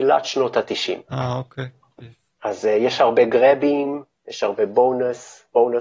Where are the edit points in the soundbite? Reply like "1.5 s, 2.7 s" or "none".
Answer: 2.0 s